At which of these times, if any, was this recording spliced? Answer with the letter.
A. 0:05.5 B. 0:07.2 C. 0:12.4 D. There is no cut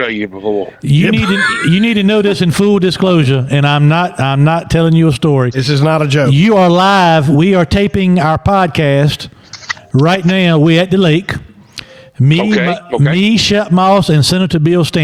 D